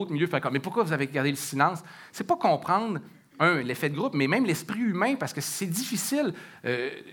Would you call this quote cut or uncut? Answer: uncut